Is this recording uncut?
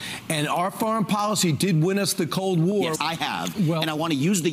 no; 1 cut; at 2.9 s

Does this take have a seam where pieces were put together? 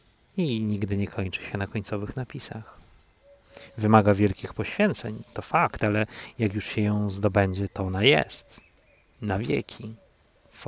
no; 0 cuts

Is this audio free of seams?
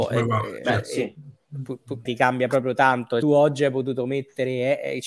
no; 2 cuts; at 2.1 s, 3.2 s

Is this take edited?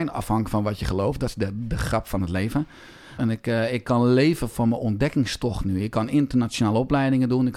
yes; 1 cut; at 3.2 s

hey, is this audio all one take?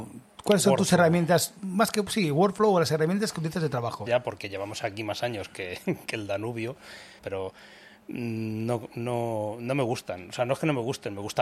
no; 2 cuts; at 4.1 s, 7.2 s

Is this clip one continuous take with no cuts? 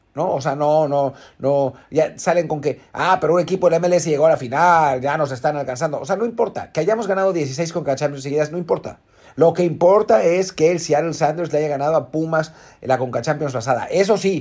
yes; 0 cuts

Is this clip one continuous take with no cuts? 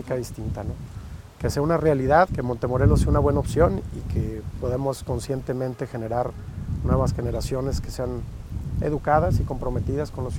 no; 1 cut; at 2.3 s

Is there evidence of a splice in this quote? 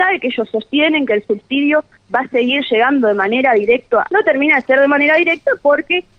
yes; 1 cut; at 4.1 s

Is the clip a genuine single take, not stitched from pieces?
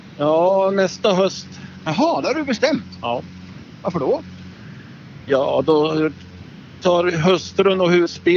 yes; 0 cuts

